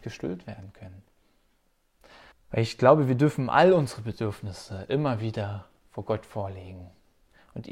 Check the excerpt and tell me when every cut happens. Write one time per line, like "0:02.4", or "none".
0:02.3

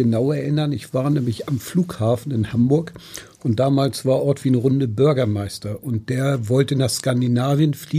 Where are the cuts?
none

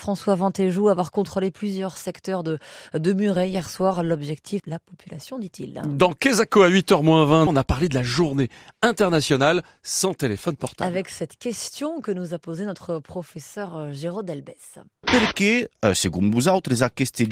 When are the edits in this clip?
0:04.6
0:07.5

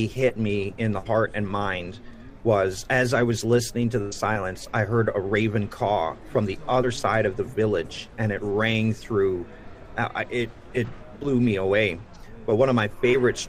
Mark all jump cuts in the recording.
none

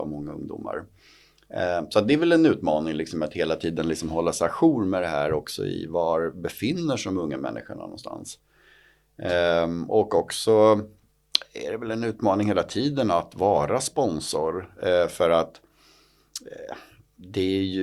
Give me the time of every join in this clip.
none

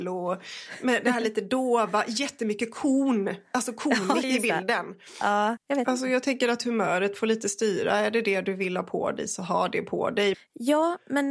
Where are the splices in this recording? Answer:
0:04.2
0:05.6
0:10.3

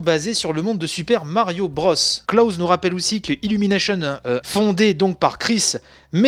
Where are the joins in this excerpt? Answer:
0:02.3
0:04.4

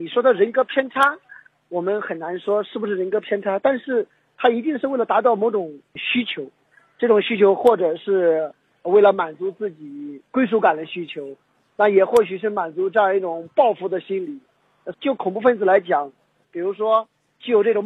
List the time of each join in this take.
0:14.9
0:16.4

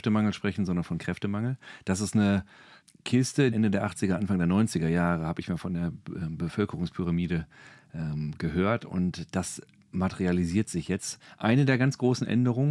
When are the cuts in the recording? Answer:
0:03.5

